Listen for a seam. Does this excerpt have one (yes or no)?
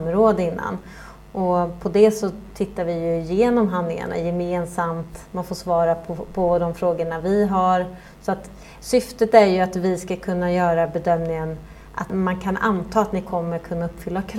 no